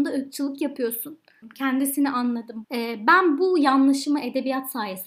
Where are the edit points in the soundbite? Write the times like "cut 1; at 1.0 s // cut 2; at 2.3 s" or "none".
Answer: cut 1; at 1.4 s // cut 2; at 2.6 s